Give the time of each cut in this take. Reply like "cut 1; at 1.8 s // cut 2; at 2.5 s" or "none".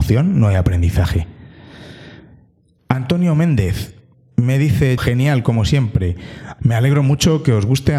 cut 1; at 5.0 s // cut 2; at 6.6 s